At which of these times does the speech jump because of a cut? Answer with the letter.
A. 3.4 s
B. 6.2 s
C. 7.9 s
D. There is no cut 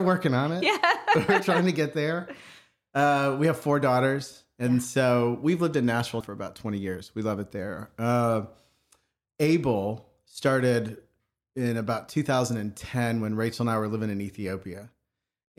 B